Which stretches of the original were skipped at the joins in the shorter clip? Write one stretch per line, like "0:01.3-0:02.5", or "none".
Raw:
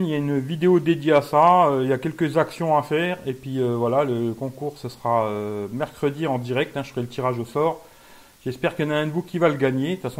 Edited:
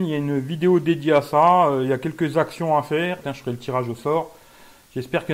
0:03.2-0:06.7

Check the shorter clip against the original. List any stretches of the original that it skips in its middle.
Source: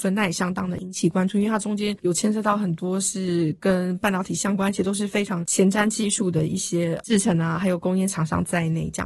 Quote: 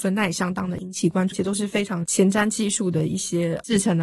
0:01.3-0:04.7

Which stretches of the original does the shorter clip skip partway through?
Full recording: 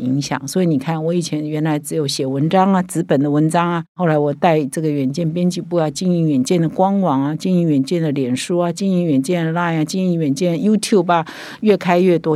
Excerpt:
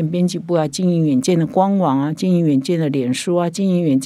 none

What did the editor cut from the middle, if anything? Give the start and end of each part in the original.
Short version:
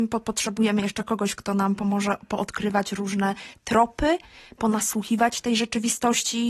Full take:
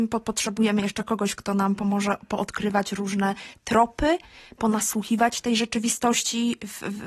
none

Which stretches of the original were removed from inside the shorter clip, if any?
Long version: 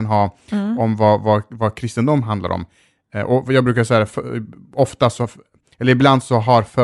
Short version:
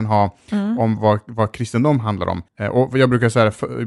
0:01.0-0:01.2
0:02.7-0:03.0

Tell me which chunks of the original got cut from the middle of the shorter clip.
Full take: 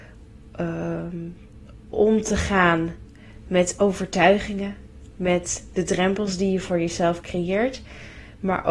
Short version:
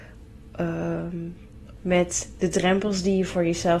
0:01.8-0:05.1

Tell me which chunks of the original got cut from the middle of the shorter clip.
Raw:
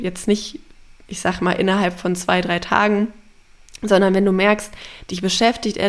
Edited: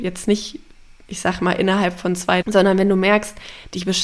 0:02.4-0:03.8

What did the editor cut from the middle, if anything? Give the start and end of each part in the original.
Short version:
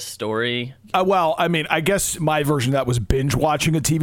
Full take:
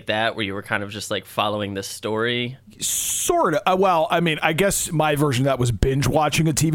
0:02.7-0:03.6

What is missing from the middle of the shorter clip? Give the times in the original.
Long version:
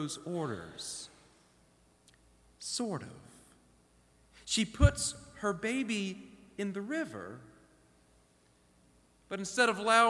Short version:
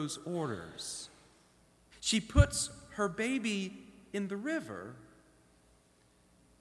0:01.9-0:04.4

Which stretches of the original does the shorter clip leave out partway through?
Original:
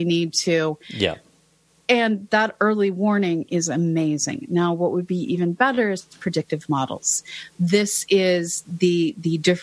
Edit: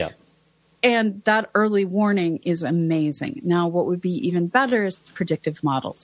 none

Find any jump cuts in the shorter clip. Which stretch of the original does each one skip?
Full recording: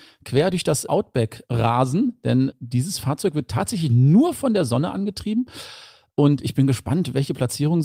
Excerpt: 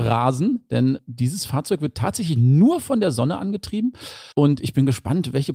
0:05.8-0:06.1

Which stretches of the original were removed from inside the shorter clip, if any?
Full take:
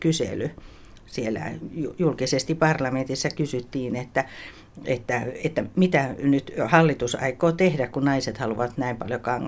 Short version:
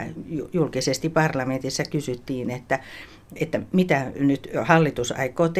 0:04.8-0:05.4

